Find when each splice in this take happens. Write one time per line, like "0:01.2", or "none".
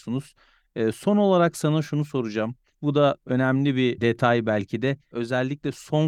0:05.1